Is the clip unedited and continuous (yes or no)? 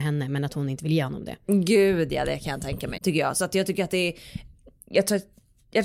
no